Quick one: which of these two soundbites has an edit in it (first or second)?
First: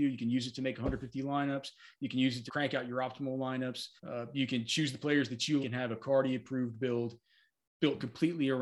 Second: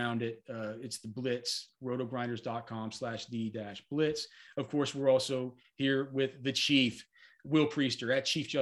first